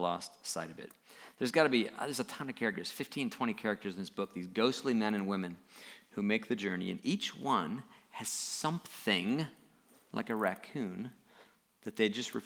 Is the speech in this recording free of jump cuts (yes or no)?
yes